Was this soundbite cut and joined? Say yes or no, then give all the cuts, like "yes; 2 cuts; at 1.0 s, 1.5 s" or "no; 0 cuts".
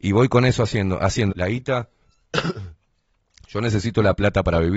yes; 1 cut; at 1.3 s